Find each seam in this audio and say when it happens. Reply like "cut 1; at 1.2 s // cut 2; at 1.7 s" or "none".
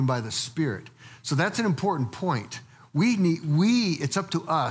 none